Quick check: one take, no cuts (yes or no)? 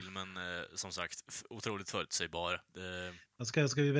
no